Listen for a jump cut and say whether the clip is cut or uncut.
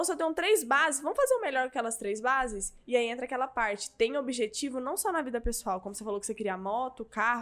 uncut